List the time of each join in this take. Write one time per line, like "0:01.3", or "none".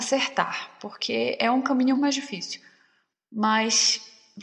0:01.9